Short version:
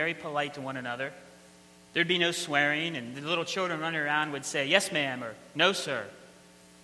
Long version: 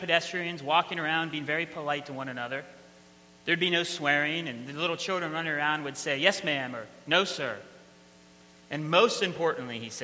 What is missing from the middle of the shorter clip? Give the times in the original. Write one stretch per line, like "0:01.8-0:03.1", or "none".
none